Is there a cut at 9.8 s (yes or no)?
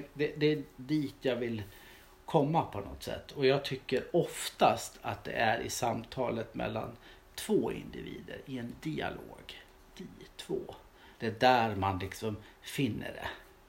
no